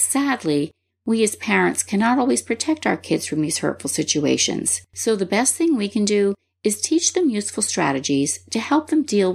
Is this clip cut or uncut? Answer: cut